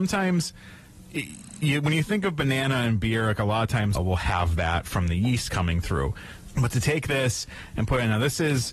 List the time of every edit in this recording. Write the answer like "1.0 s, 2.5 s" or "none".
4.0 s, 6.5 s